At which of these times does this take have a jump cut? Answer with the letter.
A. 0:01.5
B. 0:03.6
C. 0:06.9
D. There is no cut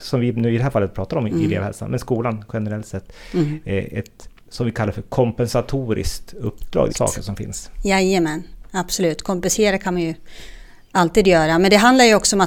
C